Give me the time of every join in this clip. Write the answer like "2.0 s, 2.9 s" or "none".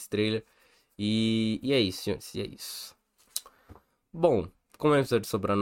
4.6 s